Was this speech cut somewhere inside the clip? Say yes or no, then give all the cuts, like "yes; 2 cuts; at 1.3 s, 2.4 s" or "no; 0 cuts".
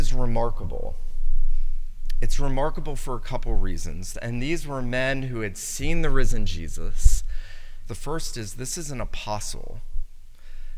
yes; 2 cuts; at 4.1 s, 7.9 s